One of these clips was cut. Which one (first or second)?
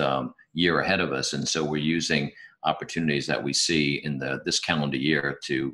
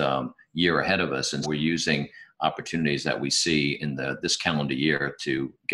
second